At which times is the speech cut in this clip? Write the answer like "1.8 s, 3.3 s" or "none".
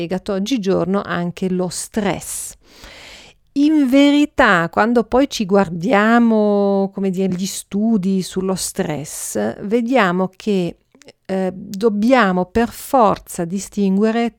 none